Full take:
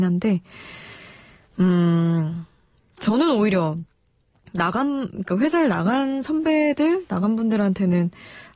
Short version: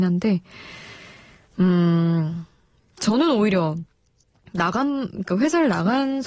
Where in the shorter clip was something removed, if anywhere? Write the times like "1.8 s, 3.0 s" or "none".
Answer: none